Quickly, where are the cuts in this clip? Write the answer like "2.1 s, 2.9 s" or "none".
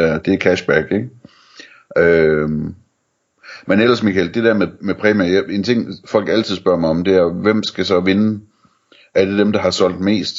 none